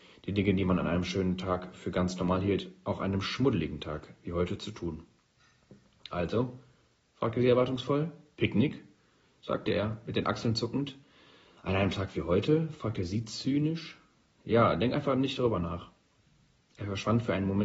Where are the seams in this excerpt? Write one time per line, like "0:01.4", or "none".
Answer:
none